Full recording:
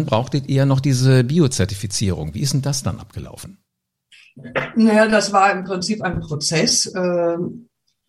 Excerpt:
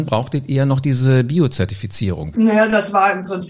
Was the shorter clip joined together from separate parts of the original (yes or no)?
yes